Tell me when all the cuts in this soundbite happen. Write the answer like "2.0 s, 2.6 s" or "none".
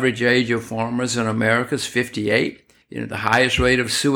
2.8 s